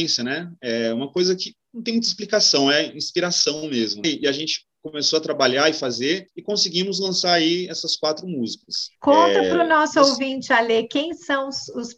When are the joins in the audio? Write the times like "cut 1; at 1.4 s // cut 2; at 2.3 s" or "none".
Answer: cut 1; at 4.0 s